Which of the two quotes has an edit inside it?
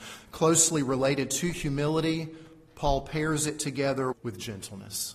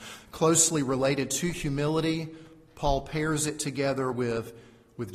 first; 1 cut; at 4.1 s

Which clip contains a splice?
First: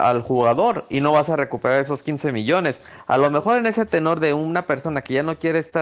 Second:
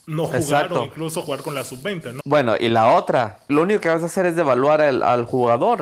second; 2 cuts; at 2.2 s, 3.5 s

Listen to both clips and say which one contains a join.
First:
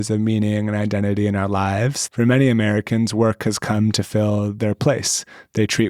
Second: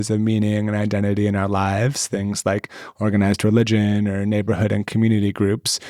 first; 1 cut; at 2.1 s

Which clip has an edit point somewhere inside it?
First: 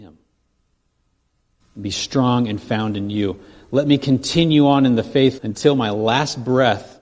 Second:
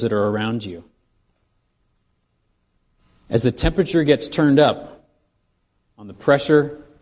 first; 2 cuts; at 1.6 s, 5.4 s

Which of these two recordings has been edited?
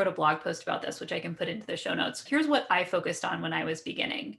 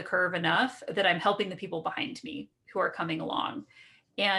first; 1 cut; at 2.3 s

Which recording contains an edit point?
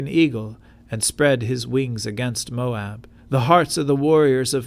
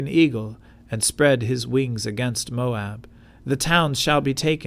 first; 1 cut; at 3.2 s

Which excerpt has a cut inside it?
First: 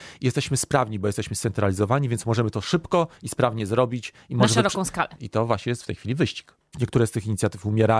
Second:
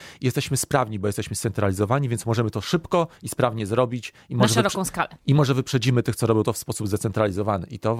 first; 2 cuts; at 5.2 s, 6.7 s

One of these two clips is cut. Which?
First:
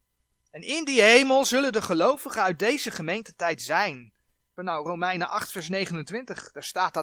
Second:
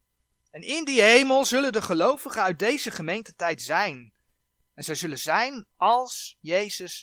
first; 1 cut; at 4.6 s

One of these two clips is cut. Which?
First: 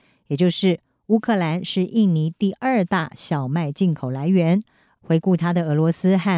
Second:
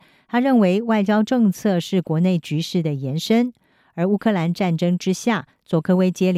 first; 1 cut; at 4.9 s

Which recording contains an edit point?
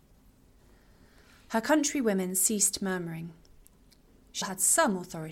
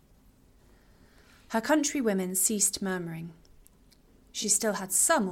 first; 1 cut; at 4.4 s

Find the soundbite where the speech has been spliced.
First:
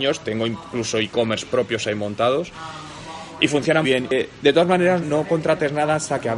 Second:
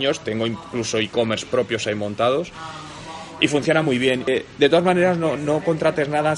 first; 2 cuts; at 3.8 s, 5.0 s

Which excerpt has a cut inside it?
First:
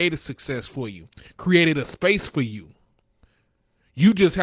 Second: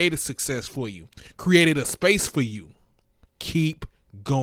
second; 1 cut; at 3.3 s

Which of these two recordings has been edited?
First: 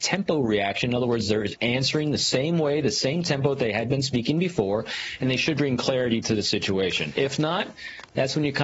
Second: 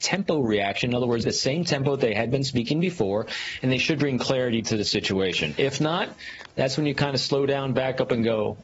second; 1 cut; at 1.2 s

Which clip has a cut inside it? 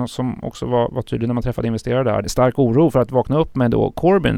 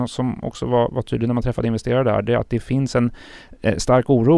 first; 1 cut; at 2.2 s

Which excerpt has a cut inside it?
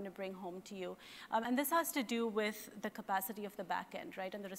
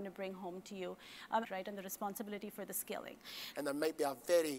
second; 2 cuts; at 1.4 s, 3.5 s

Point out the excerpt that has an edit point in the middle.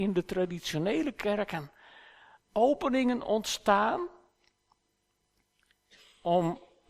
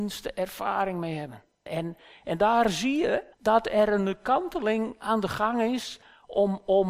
second; 2 cuts; at 1.7 s, 3.3 s

